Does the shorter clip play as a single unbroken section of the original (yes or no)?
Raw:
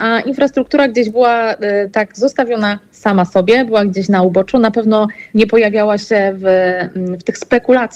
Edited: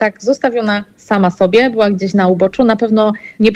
yes